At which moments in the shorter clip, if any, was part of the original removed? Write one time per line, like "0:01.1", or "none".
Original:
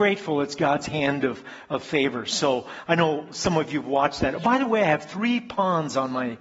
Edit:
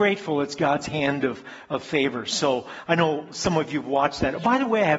none